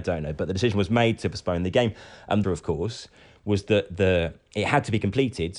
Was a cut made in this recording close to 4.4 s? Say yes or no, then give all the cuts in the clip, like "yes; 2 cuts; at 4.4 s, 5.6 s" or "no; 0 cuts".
no; 1 cut; at 2.4 s